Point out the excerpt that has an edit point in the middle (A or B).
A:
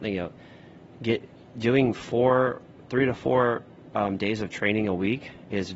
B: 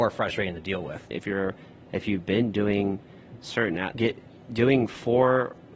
B